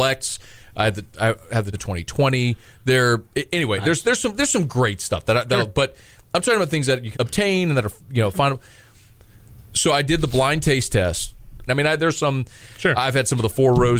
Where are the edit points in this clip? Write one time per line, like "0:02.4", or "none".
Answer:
0:01.7
0:07.1
0:11.7

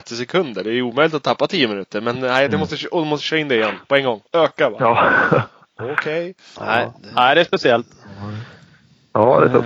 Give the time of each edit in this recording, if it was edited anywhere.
0:04.3
0:06.6

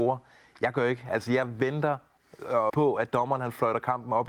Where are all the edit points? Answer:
0:02.7

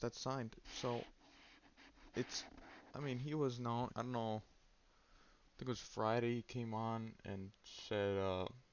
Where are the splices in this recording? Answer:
0:03.9

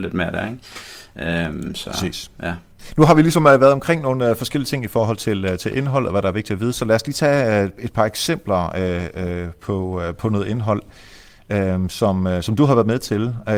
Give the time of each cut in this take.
none

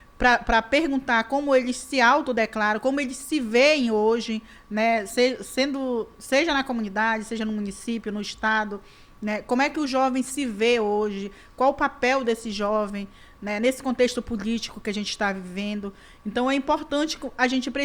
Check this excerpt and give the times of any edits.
none

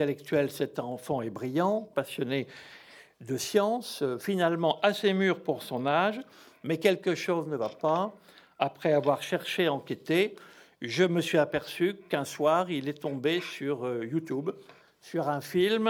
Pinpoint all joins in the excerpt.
0:01.9

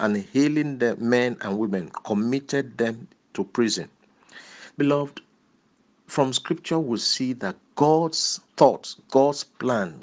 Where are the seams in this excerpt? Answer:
0:04.8
0:08.5

